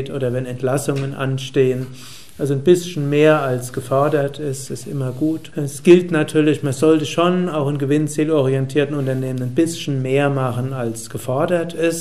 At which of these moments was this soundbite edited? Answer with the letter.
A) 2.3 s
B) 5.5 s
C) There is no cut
B